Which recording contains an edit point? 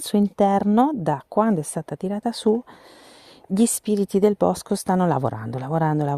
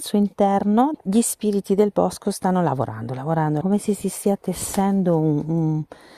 second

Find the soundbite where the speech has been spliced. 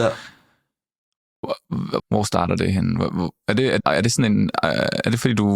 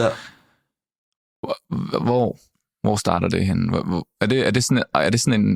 first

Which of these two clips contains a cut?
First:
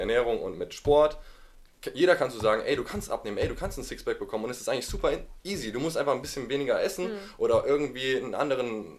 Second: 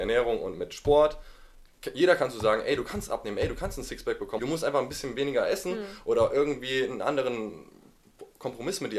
second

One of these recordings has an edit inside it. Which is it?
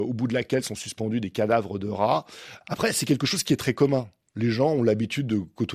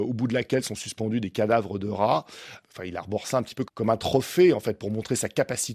first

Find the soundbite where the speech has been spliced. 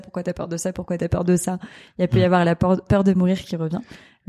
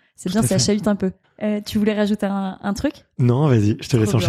second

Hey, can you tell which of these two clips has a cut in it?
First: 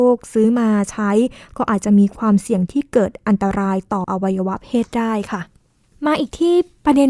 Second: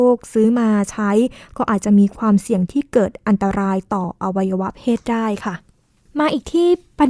first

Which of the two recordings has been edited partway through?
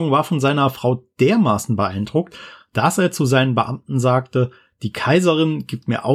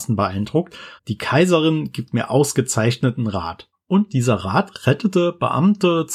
second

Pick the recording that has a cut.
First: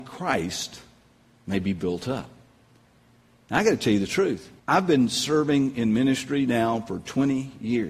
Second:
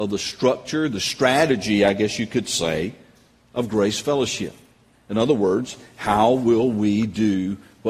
first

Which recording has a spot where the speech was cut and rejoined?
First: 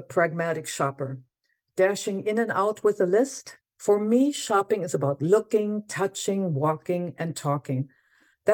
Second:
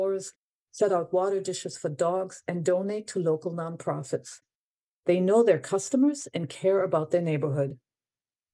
first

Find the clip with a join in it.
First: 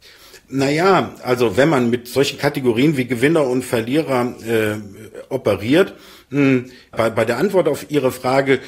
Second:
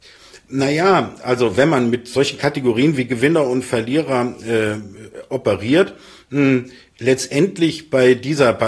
first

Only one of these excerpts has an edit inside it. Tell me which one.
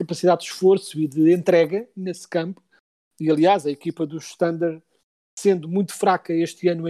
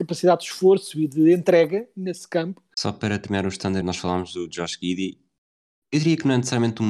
second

